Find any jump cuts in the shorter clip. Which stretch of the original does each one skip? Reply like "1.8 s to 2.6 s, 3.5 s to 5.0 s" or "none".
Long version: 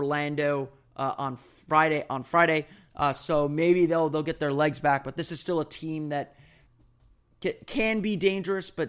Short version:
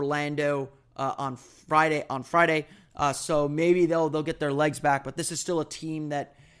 none